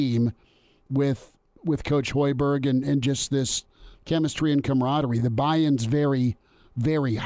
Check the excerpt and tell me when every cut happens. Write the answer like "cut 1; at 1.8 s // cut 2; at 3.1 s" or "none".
none